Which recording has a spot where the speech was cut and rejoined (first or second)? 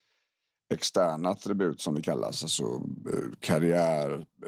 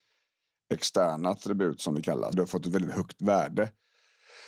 second